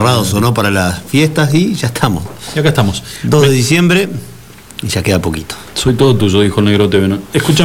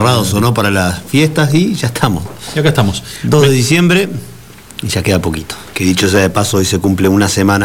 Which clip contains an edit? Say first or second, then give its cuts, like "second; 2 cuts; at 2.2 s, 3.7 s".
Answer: second; 1 cut; at 5.7 s